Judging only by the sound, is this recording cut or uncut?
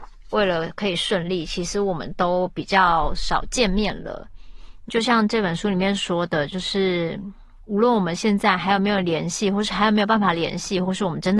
cut